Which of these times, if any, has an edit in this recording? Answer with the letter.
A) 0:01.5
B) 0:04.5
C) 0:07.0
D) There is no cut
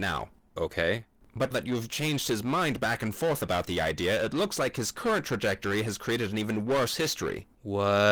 A